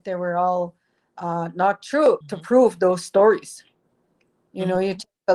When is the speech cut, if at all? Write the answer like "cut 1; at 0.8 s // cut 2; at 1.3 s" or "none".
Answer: cut 1; at 2.2 s